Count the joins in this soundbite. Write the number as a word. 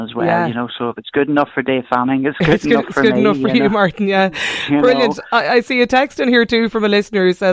zero